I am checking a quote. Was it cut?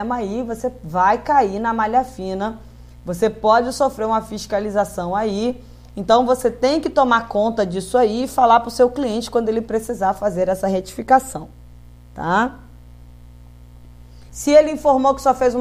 yes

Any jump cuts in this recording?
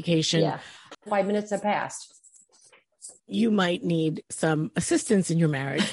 yes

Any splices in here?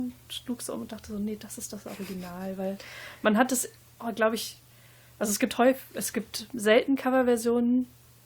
no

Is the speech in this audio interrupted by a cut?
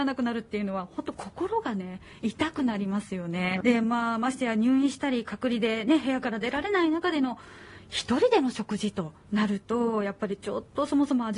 yes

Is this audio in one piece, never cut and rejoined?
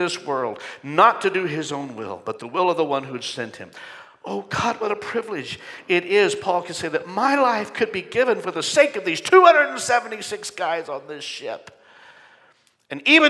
yes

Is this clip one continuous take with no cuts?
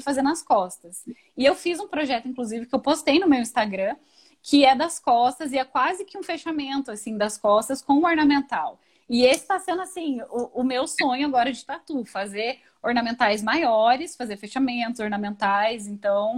yes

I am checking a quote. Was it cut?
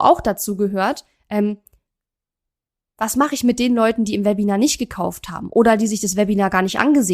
no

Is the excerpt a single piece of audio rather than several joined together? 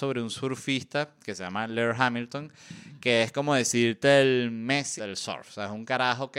no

